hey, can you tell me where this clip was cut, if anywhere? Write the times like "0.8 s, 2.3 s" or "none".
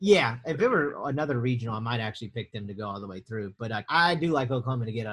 3.9 s